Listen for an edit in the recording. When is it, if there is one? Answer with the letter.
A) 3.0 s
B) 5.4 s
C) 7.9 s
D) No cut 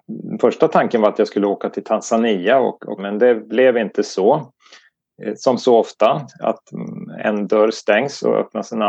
A